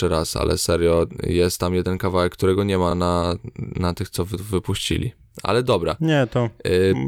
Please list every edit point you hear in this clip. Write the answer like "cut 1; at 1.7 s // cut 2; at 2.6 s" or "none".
none